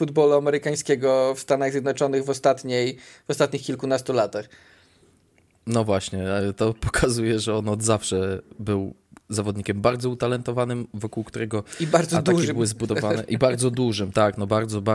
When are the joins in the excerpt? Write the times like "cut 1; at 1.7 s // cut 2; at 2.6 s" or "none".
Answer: none